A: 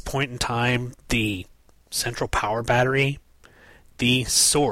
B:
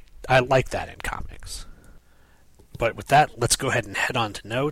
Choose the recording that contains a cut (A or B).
A